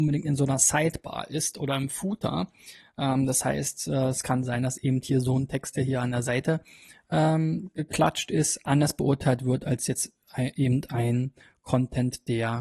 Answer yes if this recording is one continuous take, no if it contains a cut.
yes